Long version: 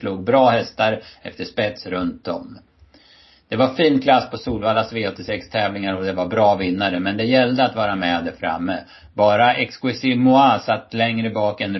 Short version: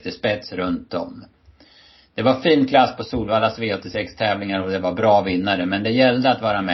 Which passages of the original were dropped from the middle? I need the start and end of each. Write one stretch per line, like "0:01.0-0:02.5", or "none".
none